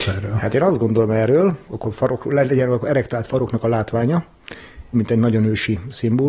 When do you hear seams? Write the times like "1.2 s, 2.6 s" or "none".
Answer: 1.7 s, 4.9 s